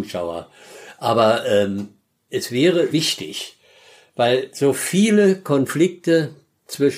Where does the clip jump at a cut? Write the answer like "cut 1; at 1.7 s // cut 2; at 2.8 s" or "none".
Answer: cut 1; at 2.9 s

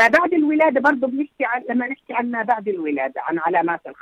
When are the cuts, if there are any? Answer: none

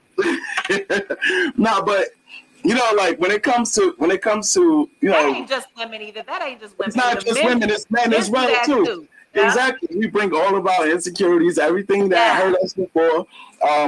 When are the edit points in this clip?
none

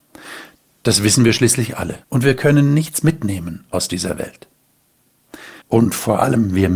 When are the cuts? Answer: cut 1; at 2.0 s // cut 2; at 5.6 s

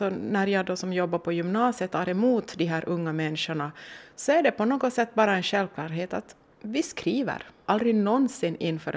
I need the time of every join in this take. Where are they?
cut 1; at 7.7 s

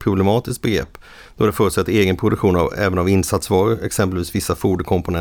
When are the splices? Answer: none

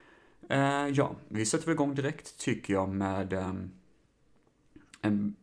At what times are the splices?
none

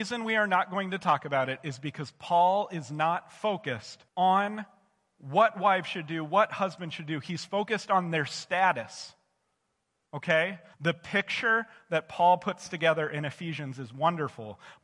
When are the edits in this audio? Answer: cut 1; at 4.1 s // cut 2; at 10.7 s

